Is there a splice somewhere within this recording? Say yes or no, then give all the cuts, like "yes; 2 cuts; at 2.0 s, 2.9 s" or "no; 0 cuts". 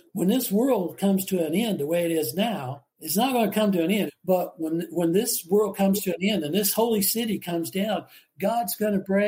yes; 2 cuts; at 2.9 s, 4.1 s